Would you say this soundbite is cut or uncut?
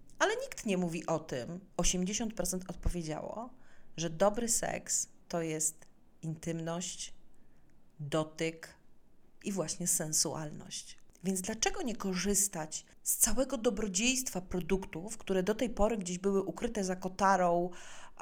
cut